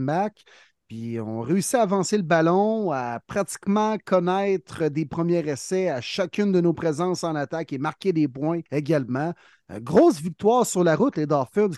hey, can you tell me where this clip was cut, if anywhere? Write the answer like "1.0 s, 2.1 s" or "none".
8.7 s